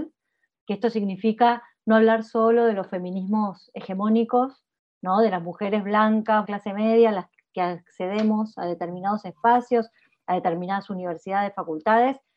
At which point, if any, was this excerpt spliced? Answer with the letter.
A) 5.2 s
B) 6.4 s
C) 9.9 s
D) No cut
B